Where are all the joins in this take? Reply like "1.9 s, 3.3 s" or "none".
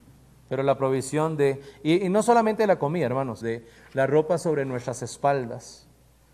3.4 s